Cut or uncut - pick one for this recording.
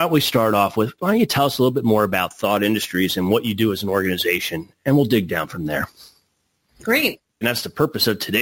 cut